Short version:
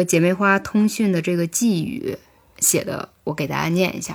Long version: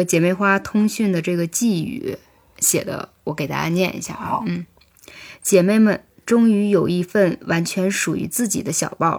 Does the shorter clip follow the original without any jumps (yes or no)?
yes